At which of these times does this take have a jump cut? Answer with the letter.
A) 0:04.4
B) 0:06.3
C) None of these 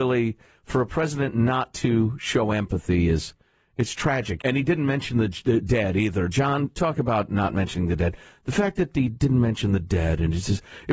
A